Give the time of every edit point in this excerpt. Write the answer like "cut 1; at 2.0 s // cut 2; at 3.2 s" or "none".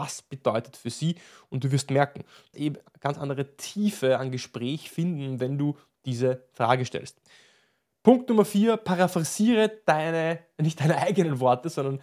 cut 1; at 2.5 s